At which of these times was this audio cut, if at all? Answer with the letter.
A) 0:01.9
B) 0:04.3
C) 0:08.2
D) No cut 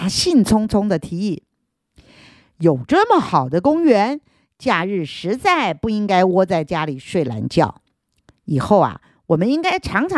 D